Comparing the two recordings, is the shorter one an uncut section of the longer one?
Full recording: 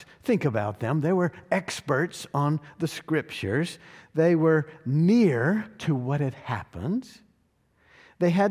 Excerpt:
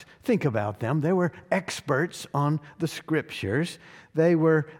yes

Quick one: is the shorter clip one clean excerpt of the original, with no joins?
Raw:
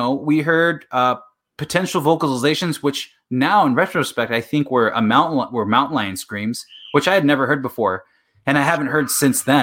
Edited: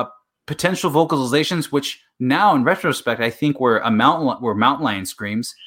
yes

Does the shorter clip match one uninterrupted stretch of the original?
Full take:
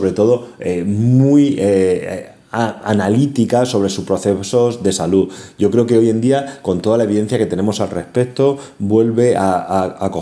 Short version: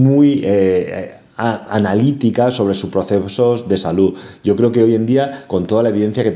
yes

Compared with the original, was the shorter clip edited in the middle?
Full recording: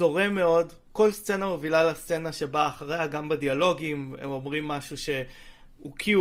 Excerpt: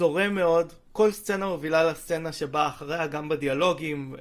no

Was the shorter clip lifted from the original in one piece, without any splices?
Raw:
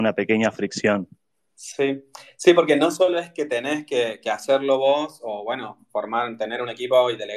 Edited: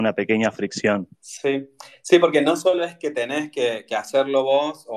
no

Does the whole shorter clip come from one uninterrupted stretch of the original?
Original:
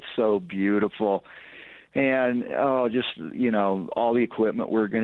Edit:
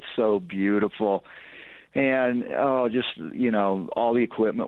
yes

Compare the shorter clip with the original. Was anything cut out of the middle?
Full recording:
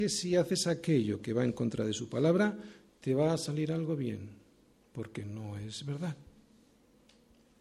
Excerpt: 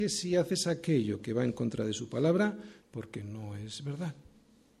yes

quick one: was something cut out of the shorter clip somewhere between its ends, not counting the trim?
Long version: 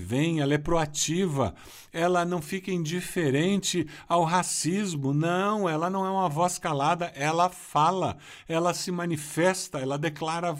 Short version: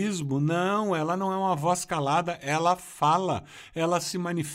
no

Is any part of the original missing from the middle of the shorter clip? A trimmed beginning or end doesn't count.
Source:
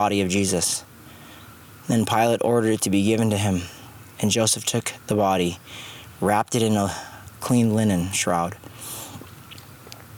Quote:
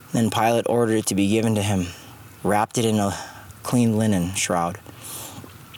yes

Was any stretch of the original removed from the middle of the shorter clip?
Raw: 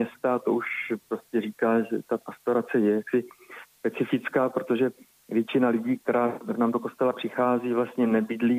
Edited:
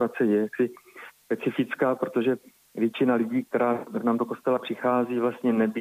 no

